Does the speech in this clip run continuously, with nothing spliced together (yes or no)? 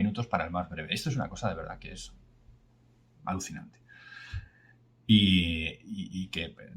yes